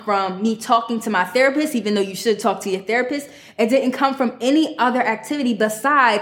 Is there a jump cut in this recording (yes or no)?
no